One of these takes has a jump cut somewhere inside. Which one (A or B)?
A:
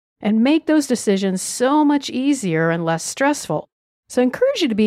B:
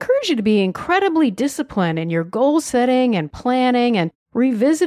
A